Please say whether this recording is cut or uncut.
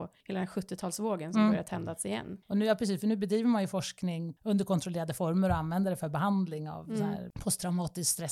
uncut